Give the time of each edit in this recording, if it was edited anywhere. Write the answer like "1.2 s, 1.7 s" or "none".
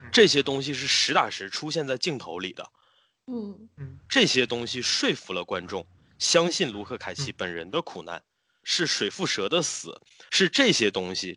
8.6 s, 10.3 s